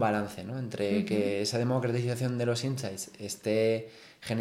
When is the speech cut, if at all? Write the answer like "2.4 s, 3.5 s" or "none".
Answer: none